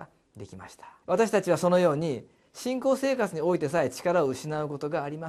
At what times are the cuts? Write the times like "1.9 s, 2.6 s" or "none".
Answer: 1.0 s

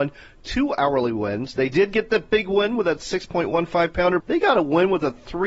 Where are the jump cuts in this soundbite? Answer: 4.2 s

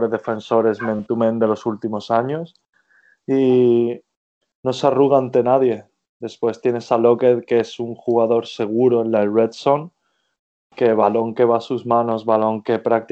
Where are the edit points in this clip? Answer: none

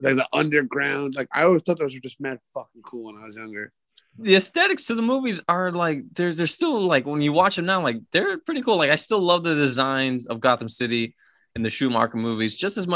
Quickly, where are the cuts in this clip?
none

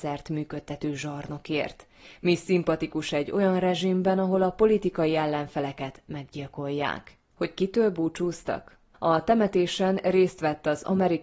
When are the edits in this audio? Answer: 7.2 s, 8.9 s

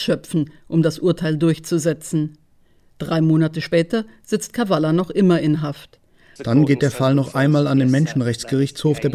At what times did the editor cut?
6.4 s

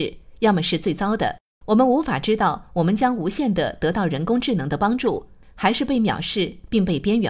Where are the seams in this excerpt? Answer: 1.6 s

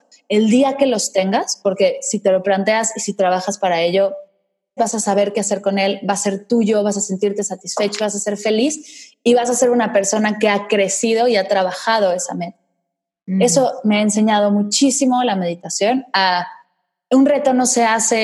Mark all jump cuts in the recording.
4.8 s

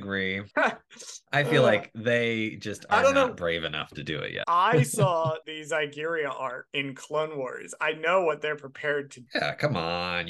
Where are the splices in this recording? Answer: 4.4 s, 9.3 s

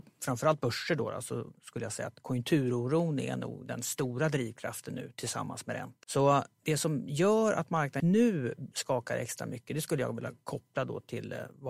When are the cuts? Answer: 6.0 s, 8.0 s

